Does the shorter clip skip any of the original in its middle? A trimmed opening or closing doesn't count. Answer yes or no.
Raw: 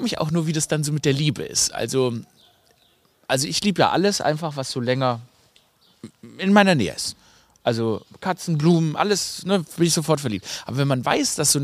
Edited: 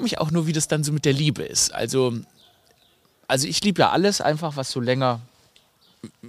no